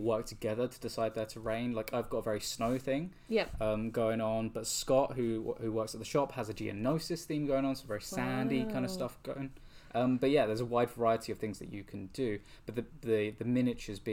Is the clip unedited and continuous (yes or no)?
yes